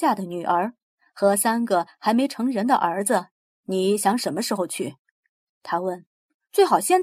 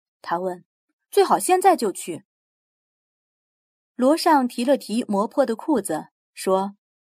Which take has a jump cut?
first; 1 cut; at 3.5 s

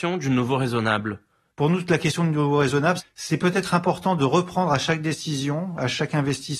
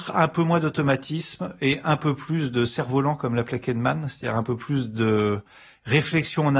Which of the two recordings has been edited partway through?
first; 2 cuts; at 1.5 s, 3.0 s

